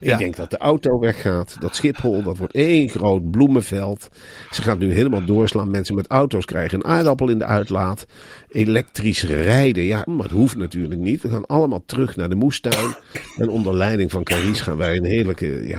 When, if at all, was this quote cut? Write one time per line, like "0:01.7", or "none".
0:10.1